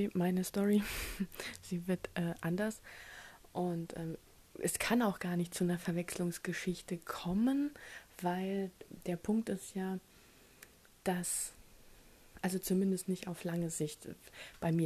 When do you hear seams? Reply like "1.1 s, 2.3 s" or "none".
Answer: 4.5 s